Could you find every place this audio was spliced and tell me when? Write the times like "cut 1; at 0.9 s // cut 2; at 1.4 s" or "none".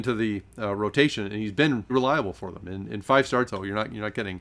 cut 1; at 1.9 s // cut 2; at 3.5 s